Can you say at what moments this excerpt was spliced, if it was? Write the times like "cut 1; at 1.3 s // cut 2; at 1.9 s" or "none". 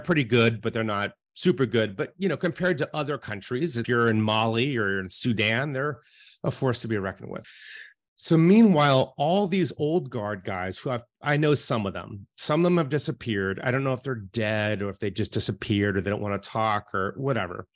none